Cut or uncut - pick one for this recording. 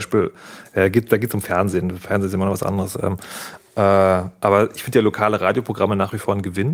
uncut